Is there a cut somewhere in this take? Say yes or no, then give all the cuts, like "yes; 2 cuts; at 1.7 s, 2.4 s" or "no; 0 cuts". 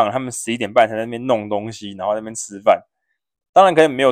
no; 0 cuts